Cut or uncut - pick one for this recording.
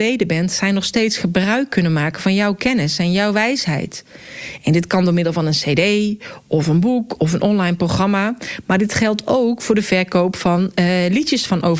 uncut